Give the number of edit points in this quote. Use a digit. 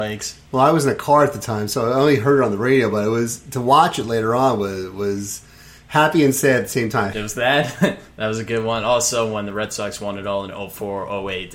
1